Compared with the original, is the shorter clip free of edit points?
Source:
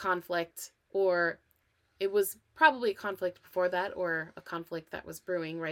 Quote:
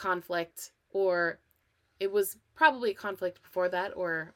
yes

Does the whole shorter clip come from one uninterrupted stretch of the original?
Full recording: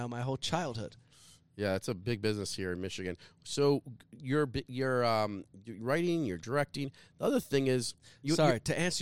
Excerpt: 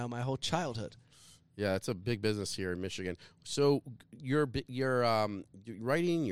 yes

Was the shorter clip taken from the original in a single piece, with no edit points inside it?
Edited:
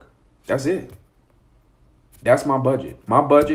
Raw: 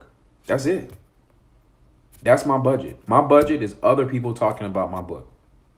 yes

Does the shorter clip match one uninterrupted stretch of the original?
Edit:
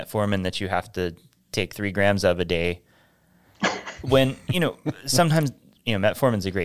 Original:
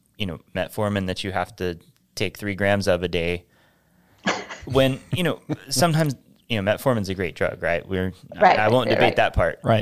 yes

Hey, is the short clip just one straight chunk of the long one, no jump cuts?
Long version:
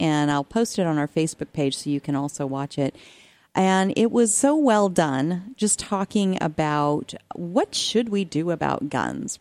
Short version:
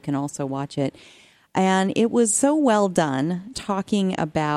no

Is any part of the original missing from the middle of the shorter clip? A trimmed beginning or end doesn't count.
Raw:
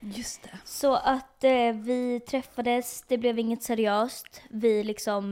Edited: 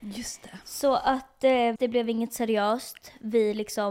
yes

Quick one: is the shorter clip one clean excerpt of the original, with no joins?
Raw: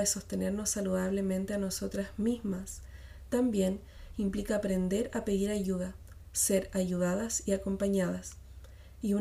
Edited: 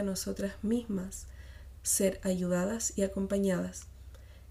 no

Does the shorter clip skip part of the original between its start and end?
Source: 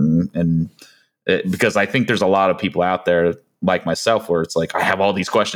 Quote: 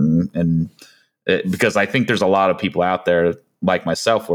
no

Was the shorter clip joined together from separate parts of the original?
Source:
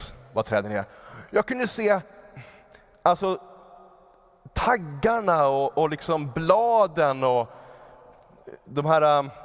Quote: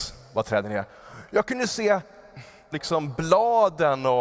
yes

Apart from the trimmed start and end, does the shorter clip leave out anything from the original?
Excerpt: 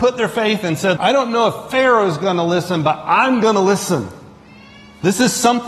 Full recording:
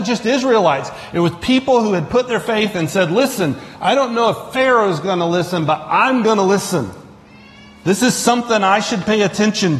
yes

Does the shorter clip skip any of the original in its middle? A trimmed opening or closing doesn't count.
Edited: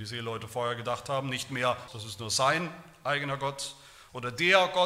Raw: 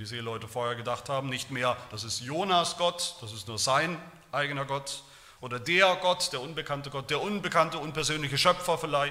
yes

